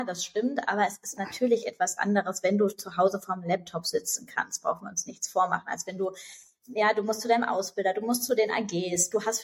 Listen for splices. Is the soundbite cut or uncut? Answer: uncut